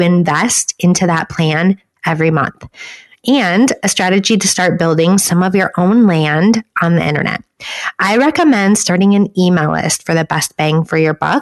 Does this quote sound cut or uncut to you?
uncut